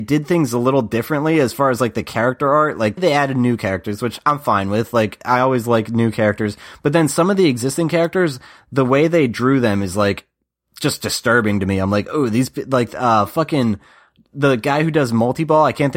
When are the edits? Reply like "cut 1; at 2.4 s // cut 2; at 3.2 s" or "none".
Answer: cut 1; at 3.0 s